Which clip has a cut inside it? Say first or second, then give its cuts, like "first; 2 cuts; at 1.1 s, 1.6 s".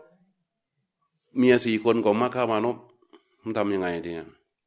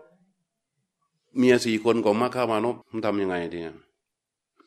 second; 1 cut; at 2.8 s